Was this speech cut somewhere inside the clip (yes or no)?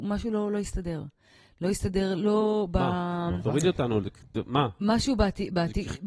no